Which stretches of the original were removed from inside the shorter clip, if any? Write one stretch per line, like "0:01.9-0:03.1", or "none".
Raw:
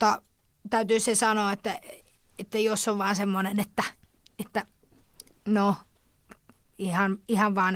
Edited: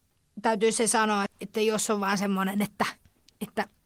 0:01.5-0:02.2